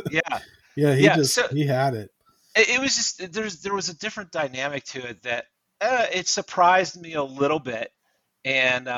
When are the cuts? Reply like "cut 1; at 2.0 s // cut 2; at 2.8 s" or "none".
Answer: none